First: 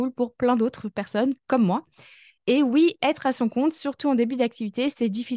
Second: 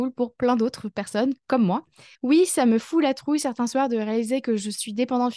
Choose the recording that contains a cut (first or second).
second